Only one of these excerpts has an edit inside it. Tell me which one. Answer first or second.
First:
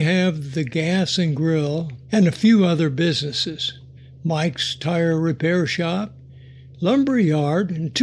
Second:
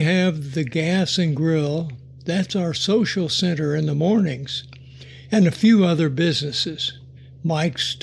first